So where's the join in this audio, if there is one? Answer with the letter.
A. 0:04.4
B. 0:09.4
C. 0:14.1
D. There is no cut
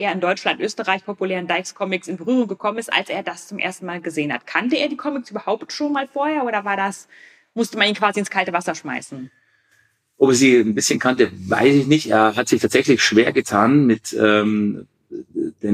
D